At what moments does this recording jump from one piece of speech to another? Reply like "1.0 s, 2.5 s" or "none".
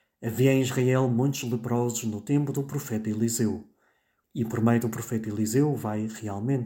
4.2 s